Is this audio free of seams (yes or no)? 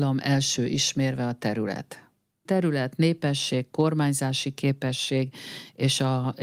no